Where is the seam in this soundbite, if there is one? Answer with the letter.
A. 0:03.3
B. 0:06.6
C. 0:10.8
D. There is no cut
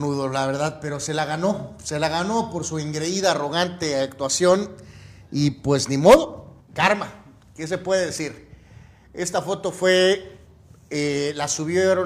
B